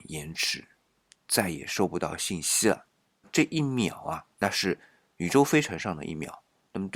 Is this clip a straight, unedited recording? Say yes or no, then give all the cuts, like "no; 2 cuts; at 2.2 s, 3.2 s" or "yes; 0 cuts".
no; 3 cuts; at 1.2 s, 3.2 s, 4.3 s